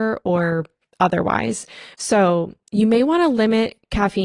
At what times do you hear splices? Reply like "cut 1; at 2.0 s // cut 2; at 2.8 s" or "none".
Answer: cut 1; at 1.9 s